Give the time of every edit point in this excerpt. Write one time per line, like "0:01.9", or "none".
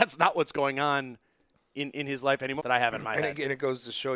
0:02.6